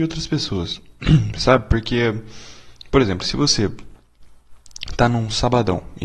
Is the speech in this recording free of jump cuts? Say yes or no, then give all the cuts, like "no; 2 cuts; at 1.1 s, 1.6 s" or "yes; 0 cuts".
yes; 0 cuts